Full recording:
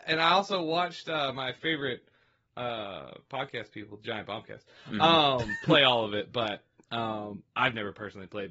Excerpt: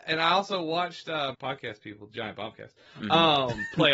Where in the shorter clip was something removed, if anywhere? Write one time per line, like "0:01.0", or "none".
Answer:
0:01.3